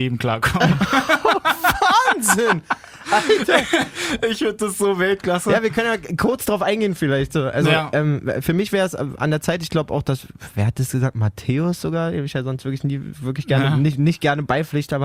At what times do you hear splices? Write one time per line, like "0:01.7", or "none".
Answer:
none